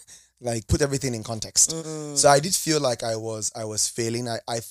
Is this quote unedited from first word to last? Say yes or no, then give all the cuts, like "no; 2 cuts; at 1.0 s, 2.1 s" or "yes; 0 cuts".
no; 1 cut; at 1.8 s